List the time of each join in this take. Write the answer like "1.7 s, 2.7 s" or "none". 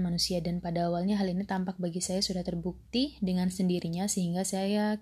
none